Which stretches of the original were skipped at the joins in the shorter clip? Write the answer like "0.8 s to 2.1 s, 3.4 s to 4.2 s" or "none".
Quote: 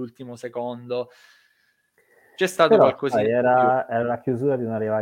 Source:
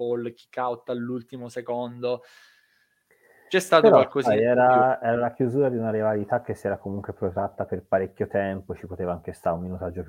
none

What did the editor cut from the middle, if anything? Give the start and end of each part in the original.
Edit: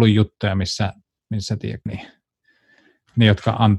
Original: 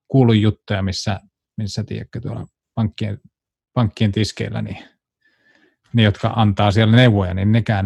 2.1 s to 4.6 s

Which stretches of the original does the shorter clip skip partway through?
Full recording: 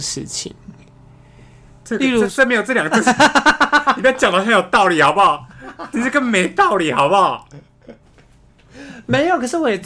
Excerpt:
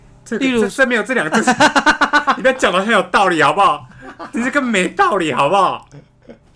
none

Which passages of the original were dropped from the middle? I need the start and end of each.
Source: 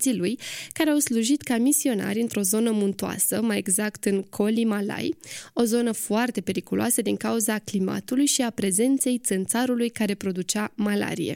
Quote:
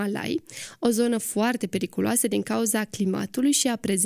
none

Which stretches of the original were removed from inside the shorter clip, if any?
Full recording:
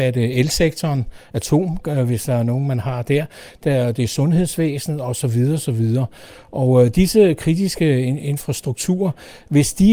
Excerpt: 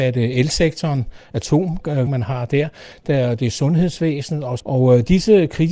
2.1 s to 2.6 s, 5.2 s to 6.5 s

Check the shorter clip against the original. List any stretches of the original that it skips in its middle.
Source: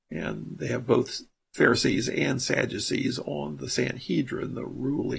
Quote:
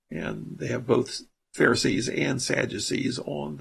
none

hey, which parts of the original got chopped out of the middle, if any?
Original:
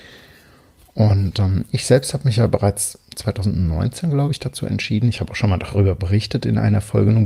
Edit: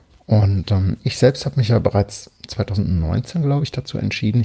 none

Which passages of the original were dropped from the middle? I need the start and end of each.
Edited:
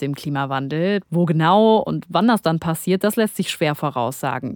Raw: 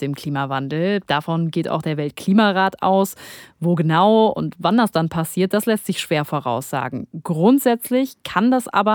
1.0 s to 3.5 s

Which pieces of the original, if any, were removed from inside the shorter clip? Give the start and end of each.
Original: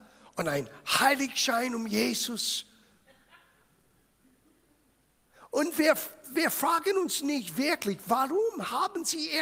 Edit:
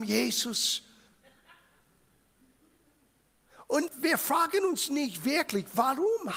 5.7 s to 6.2 s

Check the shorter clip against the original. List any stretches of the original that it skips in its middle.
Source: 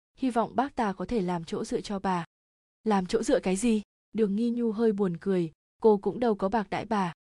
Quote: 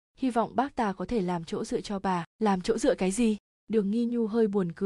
2.3 s to 2.7 s

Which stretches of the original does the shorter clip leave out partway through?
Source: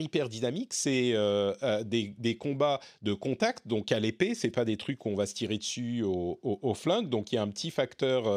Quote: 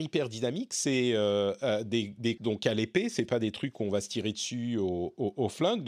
2.4 s to 3.6 s

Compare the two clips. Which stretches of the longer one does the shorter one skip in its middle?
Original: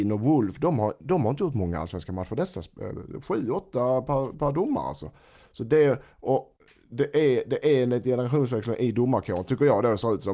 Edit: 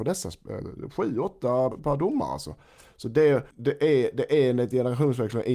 4.0 s to 4.3 s, 6.1 s to 6.8 s

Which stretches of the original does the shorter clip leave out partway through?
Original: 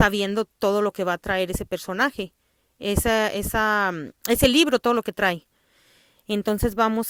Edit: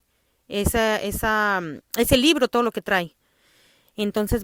none

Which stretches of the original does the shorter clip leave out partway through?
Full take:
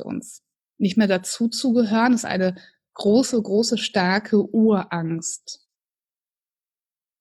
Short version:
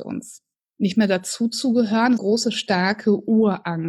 2.2 s to 3.4 s

